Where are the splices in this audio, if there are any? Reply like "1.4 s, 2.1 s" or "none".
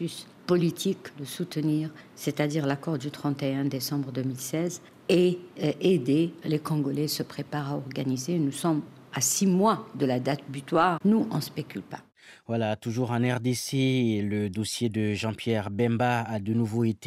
6.4 s, 11.0 s